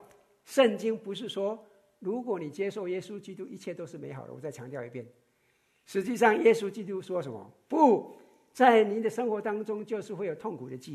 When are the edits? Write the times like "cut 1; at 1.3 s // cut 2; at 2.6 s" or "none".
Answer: none